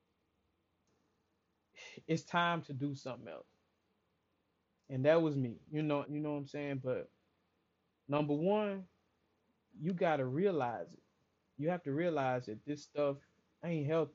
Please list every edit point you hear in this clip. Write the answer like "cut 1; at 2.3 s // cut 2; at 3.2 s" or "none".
cut 1; at 6.0 s